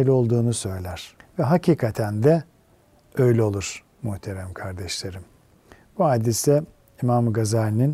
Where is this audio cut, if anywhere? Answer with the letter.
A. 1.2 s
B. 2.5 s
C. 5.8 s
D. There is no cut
A